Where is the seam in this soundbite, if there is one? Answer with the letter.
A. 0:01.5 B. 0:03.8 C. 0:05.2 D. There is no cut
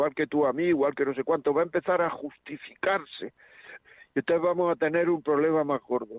B